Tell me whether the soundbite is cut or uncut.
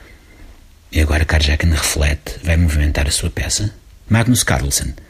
cut